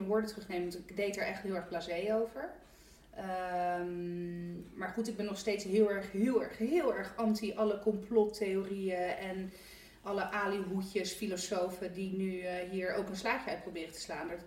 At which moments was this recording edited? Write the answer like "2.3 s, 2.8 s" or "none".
none

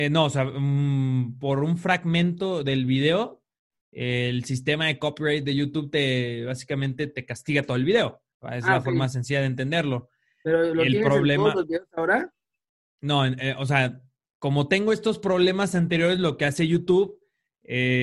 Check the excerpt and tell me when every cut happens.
none

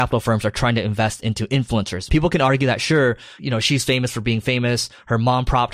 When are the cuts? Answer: 2.1 s

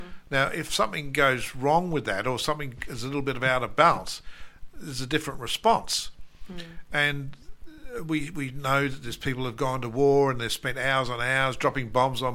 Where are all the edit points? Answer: none

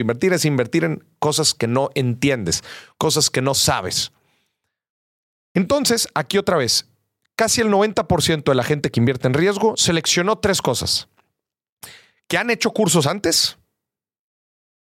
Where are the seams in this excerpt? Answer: none

